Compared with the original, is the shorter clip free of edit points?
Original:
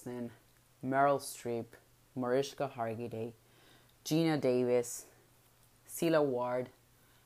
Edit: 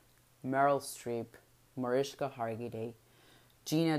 yes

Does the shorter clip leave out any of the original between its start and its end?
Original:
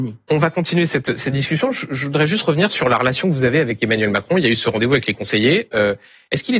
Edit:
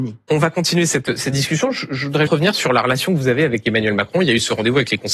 yes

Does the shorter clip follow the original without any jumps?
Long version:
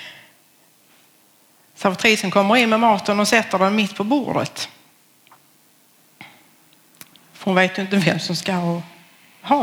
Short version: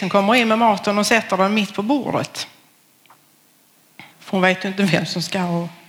no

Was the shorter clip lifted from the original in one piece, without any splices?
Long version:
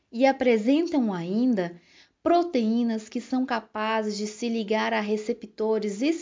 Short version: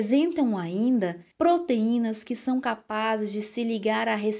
no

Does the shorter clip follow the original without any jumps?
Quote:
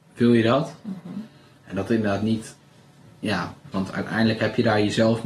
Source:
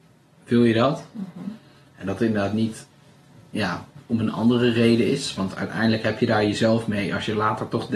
no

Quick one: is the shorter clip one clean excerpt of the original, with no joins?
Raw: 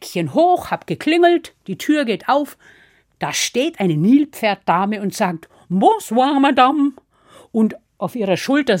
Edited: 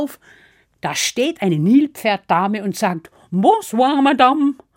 yes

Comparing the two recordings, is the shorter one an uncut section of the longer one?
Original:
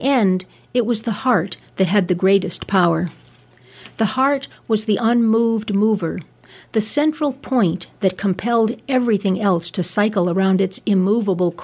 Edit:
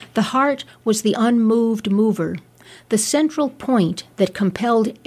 yes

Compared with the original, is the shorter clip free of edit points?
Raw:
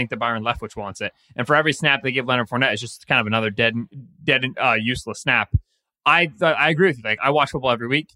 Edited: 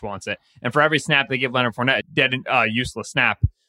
no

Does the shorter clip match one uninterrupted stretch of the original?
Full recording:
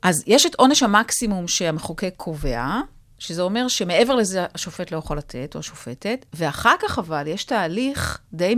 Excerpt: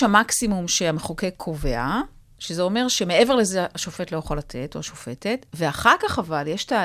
yes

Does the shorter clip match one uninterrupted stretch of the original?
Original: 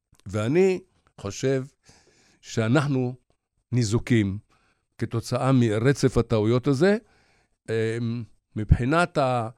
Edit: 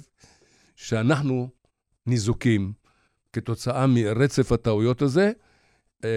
yes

